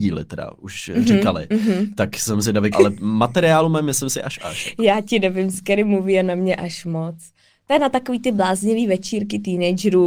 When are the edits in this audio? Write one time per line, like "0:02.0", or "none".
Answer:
0:02.7